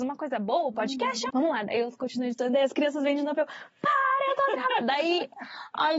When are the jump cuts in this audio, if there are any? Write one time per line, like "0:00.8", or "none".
0:01.3